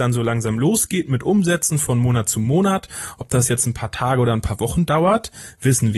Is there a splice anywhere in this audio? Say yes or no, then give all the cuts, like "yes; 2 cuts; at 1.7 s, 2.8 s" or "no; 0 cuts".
no; 0 cuts